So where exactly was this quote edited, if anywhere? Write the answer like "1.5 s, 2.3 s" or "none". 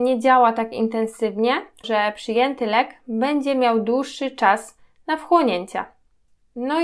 1.8 s

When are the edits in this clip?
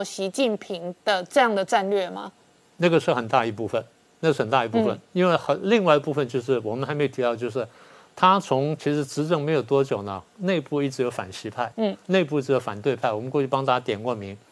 none

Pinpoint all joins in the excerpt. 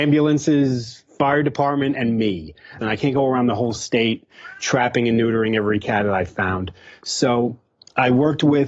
2.8 s

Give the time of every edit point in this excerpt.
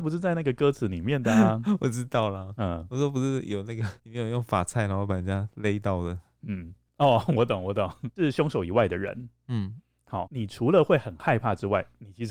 4.0 s, 8.1 s, 10.3 s

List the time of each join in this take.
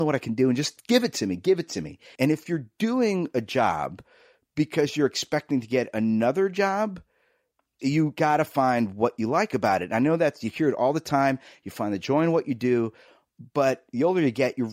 2.2 s

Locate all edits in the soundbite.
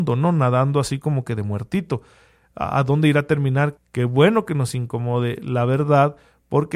3.8 s

